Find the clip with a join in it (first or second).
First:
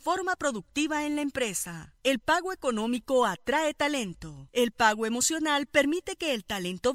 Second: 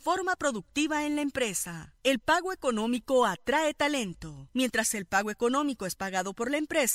second